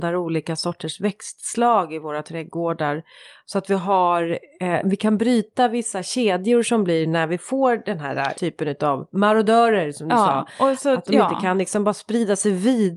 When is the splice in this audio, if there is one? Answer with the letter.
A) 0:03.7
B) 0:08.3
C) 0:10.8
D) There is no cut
B